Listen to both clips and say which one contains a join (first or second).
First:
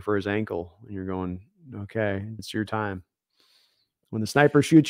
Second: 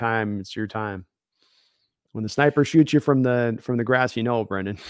first